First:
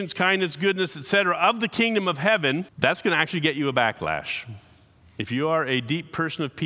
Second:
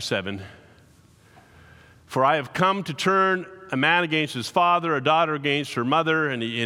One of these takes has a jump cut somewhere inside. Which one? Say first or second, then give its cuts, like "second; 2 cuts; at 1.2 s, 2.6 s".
first; 1 cut; at 2.7 s